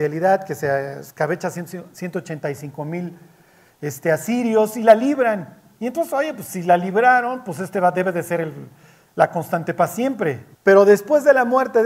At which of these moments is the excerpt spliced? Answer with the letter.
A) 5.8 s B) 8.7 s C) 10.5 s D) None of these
C